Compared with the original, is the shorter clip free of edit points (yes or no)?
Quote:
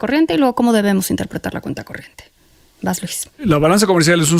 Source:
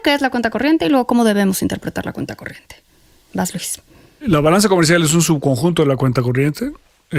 no